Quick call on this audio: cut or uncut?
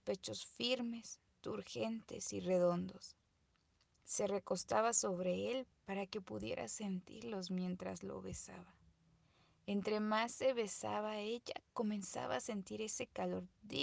uncut